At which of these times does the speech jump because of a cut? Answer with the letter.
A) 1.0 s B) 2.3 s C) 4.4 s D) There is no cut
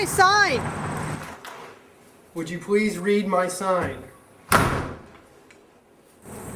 B